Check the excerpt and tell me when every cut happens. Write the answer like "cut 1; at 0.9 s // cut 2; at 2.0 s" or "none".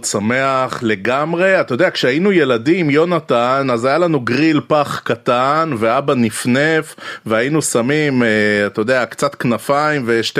none